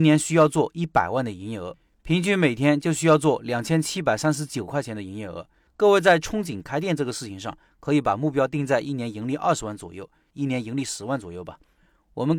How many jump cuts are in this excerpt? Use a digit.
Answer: 2